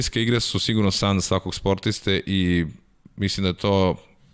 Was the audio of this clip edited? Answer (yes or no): no